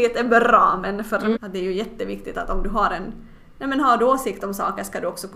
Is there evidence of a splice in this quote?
yes; 1 cut; at 1.3 s

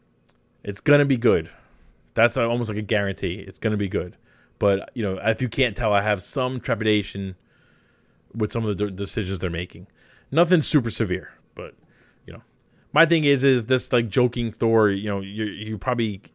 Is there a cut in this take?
yes; 1 cut; at 11.4 s

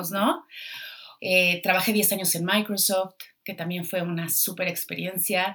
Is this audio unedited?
no; 1 cut; at 1.2 s

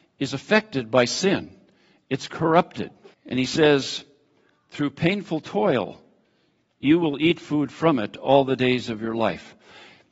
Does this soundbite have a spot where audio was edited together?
yes; 1 cut; at 3.1 s

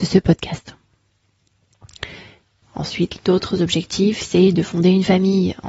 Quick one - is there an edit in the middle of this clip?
yes; 1 cut; at 2.6 s

